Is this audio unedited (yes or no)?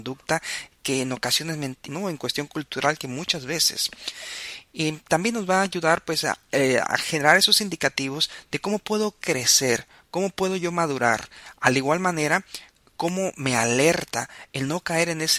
no